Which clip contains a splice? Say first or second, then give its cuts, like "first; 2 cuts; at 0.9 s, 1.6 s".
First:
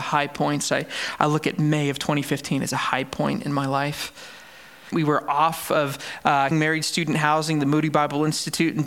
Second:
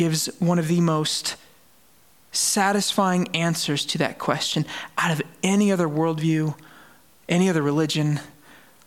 first; 2 cuts; at 4.9 s, 6.5 s